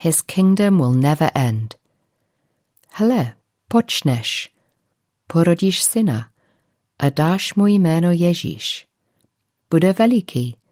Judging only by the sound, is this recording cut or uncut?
cut